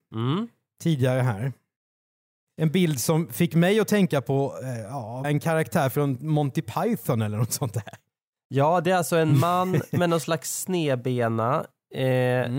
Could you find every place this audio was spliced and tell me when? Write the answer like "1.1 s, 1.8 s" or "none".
5.2 s